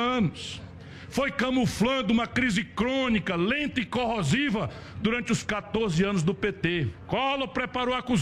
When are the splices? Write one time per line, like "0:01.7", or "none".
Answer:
none